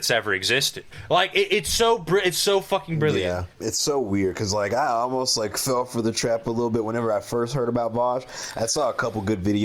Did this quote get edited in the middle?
yes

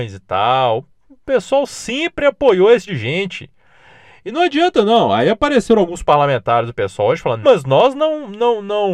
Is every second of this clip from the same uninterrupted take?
no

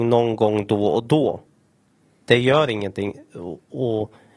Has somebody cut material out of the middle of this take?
no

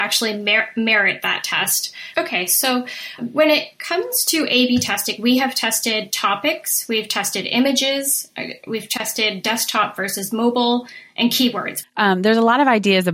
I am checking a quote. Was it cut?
yes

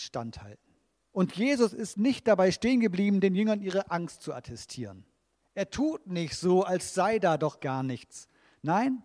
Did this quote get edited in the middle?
yes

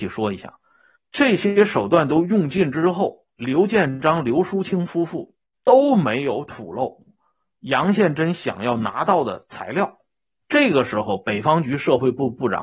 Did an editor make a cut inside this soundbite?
yes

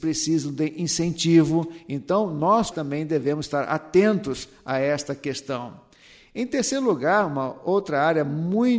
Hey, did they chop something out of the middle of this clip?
yes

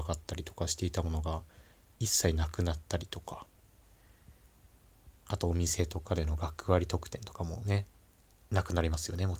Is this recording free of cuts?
yes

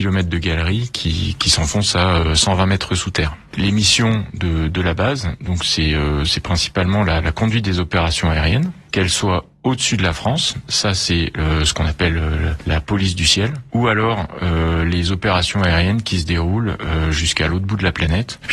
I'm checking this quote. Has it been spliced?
no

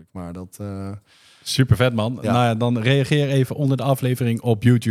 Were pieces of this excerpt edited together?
no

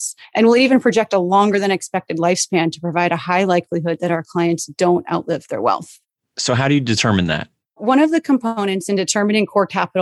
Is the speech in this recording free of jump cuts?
yes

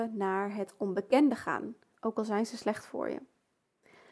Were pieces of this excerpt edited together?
yes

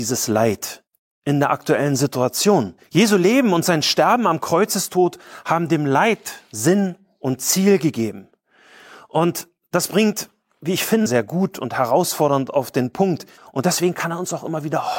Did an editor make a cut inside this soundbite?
yes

